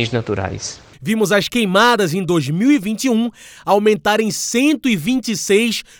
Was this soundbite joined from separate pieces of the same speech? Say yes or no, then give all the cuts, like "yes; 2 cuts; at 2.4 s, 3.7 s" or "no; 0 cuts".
yes; 1 cut; at 0.9 s